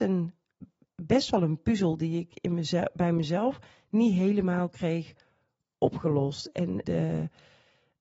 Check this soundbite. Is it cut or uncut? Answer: cut